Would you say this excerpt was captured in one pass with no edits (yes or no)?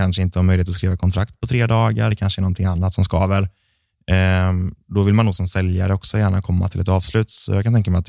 yes